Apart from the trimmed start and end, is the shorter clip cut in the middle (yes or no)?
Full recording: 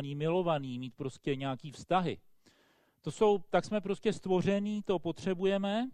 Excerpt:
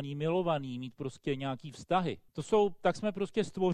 yes